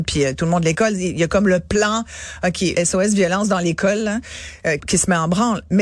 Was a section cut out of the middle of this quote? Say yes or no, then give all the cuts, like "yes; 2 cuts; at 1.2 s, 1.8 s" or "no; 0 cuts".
yes; 2 cuts; at 2.8 s, 4.8 s